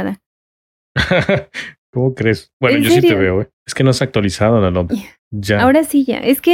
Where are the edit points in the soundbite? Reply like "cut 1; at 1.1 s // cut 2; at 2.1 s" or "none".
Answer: cut 1; at 3.6 s // cut 2; at 4.9 s

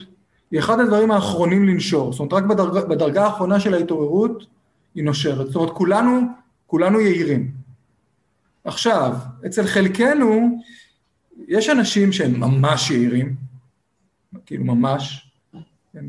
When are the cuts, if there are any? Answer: none

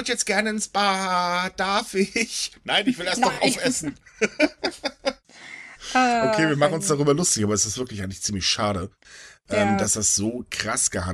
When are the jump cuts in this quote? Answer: none

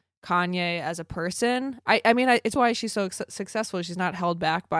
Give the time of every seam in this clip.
cut 1; at 2.6 s

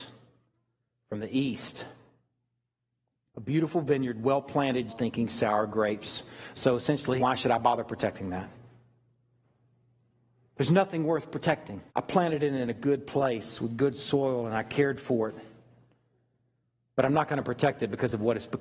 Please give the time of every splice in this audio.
cut 1; at 4.9 s // cut 2; at 7.2 s // cut 3; at 11.9 s

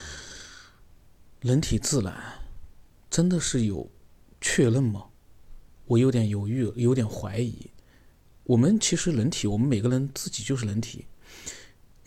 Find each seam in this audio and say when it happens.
none

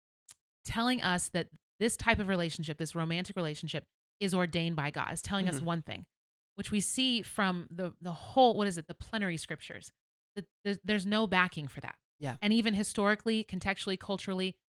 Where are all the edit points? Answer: cut 1; at 8.9 s

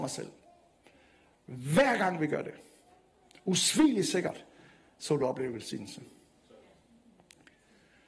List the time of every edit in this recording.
none

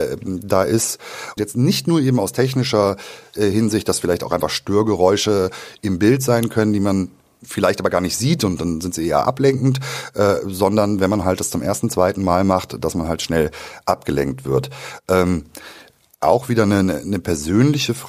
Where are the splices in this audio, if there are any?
cut 1; at 1.4 s

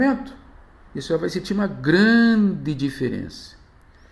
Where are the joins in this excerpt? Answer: none

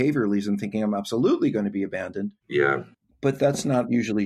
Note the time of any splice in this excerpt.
cut 1; at 2.4 s

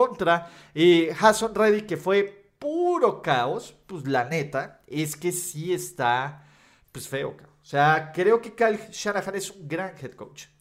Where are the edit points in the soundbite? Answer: none

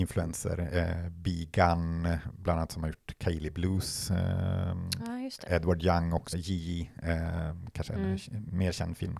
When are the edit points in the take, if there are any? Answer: cut 1; at 6.3 s

